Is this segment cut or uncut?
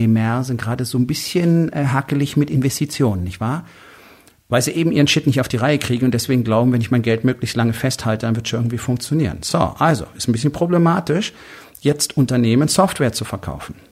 uncut